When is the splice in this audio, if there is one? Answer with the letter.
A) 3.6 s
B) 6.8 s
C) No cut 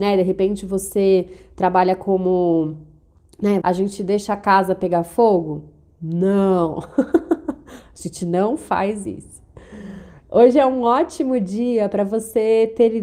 A